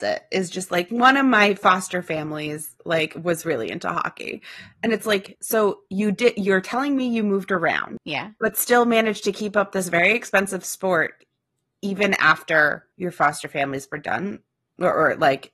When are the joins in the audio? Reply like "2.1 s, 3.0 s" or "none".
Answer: 12.9 s